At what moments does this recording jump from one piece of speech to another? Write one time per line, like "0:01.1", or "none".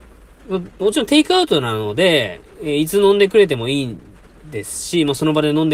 none